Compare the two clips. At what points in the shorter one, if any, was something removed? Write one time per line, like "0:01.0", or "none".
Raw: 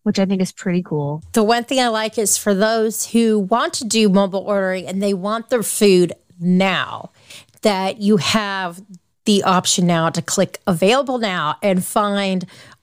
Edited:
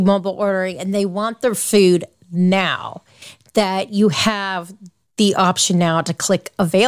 none